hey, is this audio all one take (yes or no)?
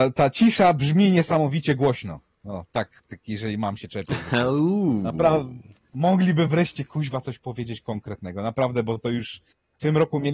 yes